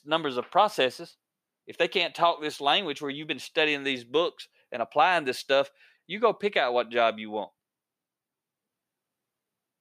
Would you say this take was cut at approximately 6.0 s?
yes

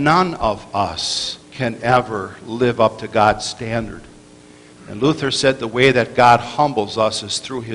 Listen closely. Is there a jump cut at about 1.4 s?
yes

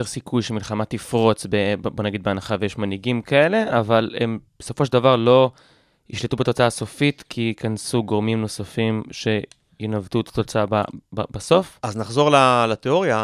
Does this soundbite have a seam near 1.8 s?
no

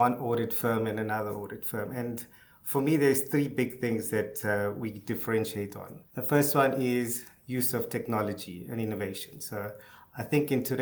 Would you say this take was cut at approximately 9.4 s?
no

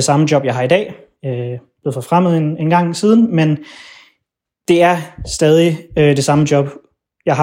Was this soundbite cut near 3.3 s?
no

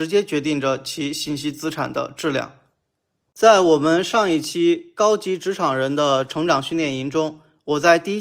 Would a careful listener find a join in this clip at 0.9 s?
no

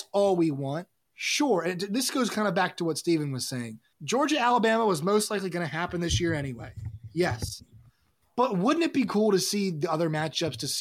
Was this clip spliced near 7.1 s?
no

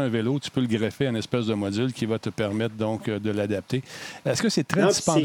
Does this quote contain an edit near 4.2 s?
yes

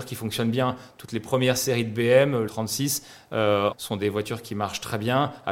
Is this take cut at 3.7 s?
yes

